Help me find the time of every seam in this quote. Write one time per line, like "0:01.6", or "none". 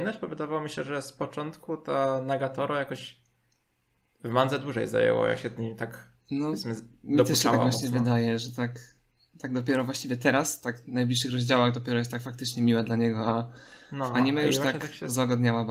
none